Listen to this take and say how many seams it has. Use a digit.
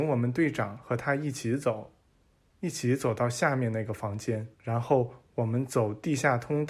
2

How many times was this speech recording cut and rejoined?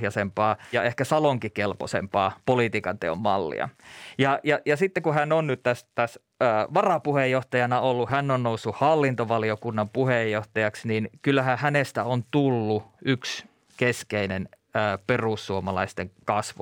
1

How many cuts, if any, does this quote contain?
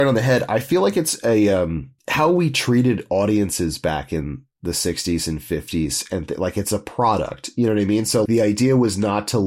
2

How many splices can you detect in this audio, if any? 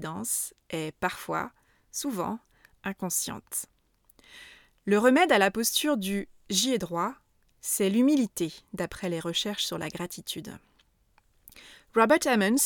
0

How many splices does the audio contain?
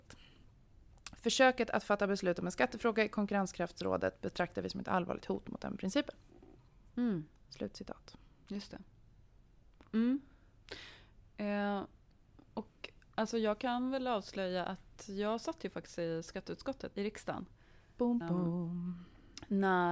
2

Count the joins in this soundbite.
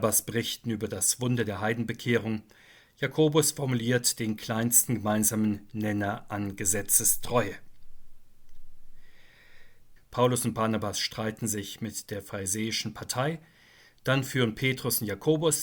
1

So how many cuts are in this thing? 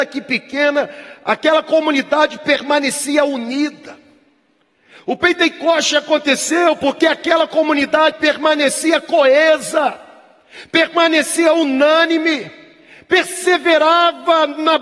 1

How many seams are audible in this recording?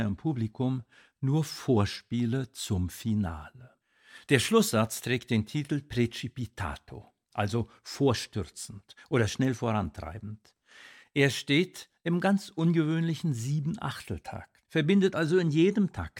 1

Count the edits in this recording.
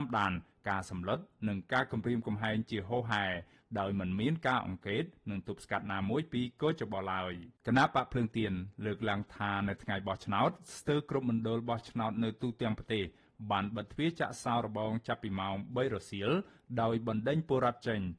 1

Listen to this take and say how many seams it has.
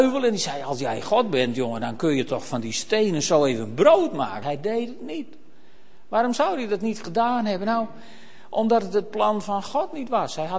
1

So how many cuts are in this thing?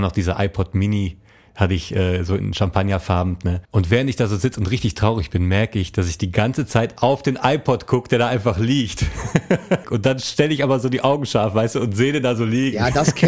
2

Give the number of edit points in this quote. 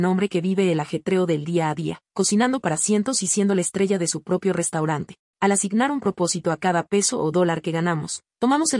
1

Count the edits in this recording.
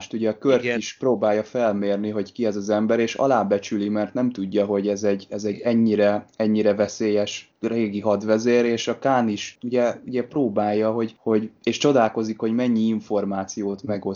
0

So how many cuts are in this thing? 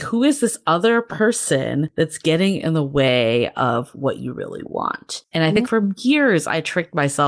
1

